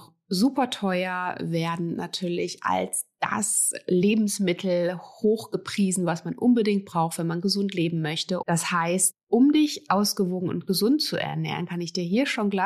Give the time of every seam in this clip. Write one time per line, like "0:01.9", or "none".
0:08.4